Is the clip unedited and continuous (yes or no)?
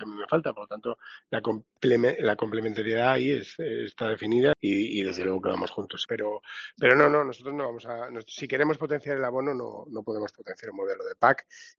no